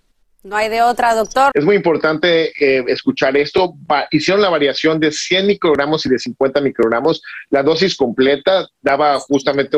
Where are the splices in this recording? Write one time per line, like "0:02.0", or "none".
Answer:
0:01.5